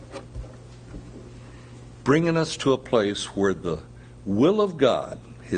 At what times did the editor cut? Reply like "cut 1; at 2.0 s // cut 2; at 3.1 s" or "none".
cut 1; at 2.0 s